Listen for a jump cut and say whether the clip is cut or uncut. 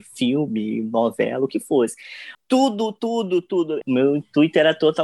cut